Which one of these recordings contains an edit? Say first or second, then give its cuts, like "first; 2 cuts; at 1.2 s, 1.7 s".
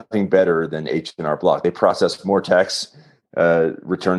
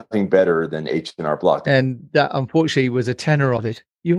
second; 1 cut; at 1.6 s